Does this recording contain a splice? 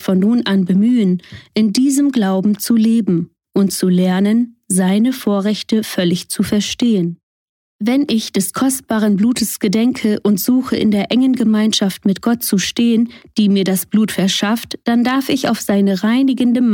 no; 0 cuts

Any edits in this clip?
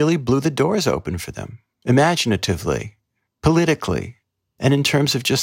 no; 0 cuts

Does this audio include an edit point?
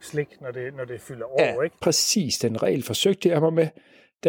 no; 0 cuts

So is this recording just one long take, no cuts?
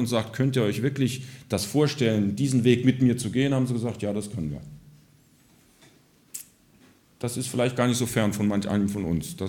yes; 0 cuts

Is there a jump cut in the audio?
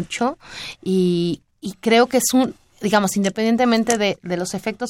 yes; 1 cut; at 1.5 s

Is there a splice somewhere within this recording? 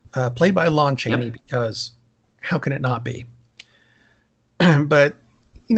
no; 0 cuts

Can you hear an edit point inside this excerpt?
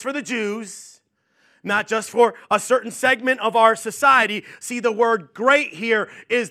no; 0 cuts

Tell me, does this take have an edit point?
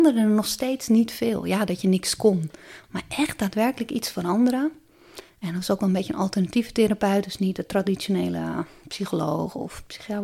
yes; 1 cut; at 5.3 s

